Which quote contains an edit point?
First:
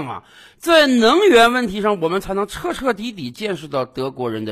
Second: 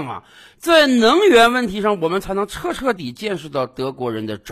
second; 1 cut; at 3.0 s

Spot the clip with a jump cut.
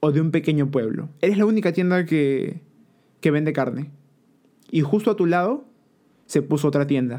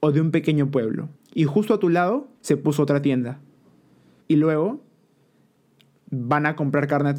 second; 3 cuts; at 1.2 s, 2.3 s, 4.2 s

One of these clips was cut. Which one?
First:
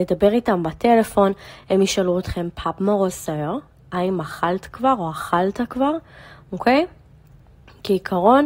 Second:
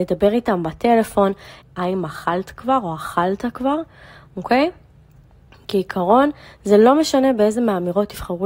second; 1 cut; at 1.6 s

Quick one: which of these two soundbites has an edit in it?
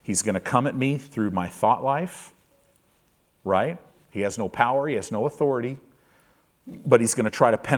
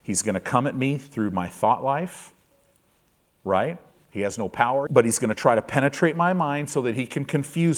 second; 1 cut; at 4.9 s

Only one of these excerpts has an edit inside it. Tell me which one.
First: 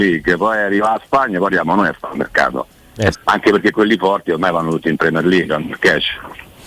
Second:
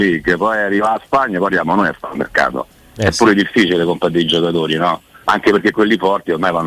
first; 2 cuts; at 3.1 s, 5.5 s

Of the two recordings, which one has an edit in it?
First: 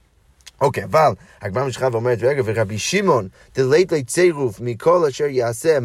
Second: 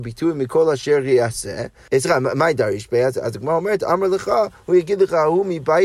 second; 1 cut; at 1.9 s

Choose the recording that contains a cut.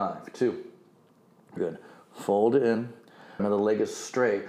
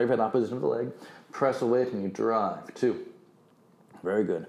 first; 2 cuts; at 1.6 s, 3.4 s

